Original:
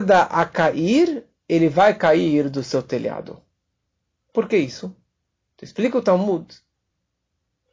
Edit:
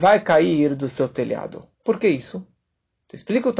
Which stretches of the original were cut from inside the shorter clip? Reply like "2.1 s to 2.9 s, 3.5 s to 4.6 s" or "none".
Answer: 3.5 s to 4.2 s